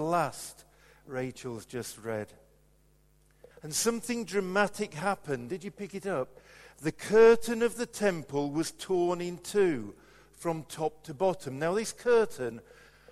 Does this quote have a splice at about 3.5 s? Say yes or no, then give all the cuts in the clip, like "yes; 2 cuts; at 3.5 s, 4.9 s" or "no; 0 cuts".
yes; 1 cut; at 3.5 s